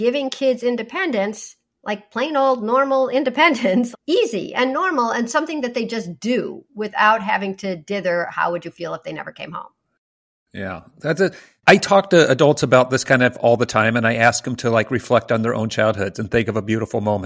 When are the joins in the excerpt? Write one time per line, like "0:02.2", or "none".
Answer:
0:03.9